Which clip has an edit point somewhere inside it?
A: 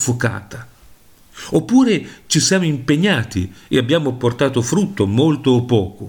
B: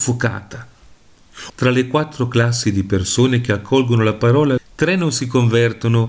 B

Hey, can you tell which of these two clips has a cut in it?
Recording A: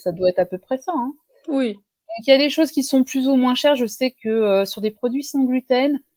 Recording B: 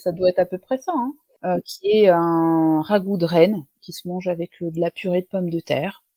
B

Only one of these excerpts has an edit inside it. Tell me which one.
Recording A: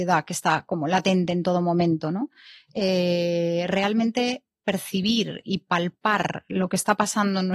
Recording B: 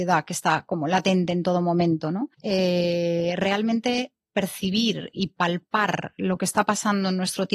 B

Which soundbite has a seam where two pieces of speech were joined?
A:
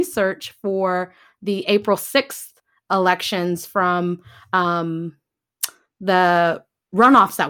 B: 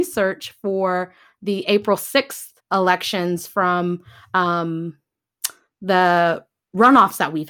B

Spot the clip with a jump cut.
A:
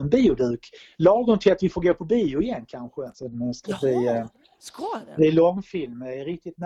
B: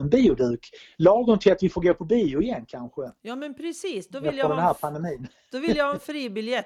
A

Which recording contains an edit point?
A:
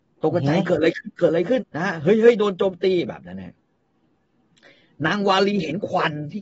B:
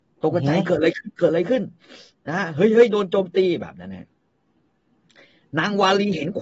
A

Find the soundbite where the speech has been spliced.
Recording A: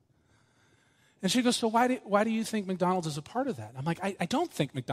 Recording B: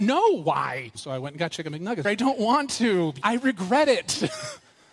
B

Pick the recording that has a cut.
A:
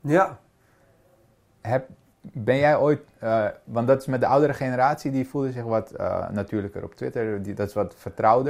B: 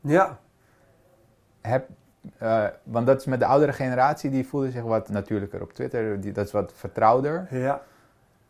B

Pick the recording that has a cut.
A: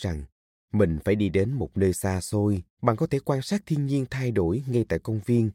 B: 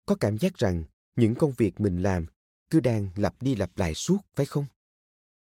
A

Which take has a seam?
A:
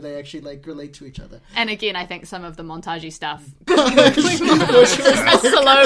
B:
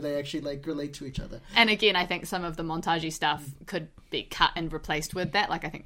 A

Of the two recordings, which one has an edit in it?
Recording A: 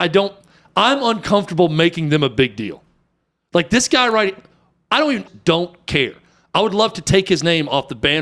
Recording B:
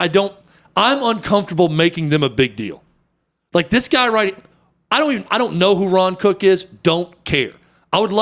A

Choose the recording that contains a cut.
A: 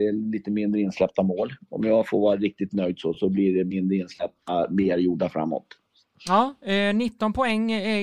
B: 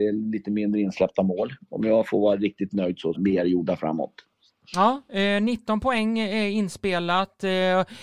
B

